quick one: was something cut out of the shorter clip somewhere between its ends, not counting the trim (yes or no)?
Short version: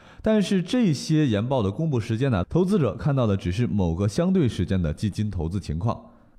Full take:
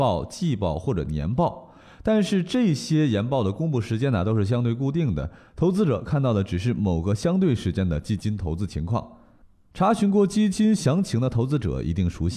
yes